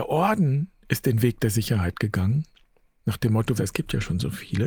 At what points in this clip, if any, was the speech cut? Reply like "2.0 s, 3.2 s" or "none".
3.6 s